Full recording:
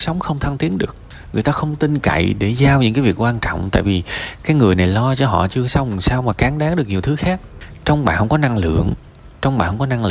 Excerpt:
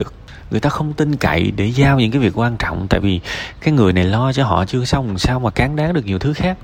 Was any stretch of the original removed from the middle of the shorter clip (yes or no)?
no